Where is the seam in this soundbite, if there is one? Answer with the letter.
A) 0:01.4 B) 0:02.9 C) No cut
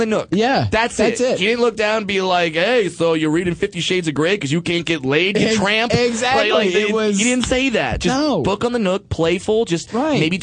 C